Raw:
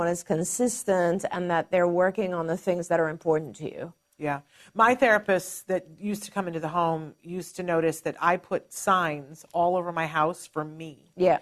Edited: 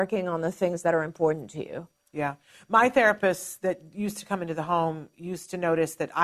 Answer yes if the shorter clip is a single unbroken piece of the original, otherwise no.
yes